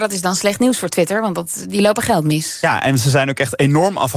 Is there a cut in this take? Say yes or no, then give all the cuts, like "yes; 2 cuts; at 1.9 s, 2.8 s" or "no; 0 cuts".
no; 0 cuts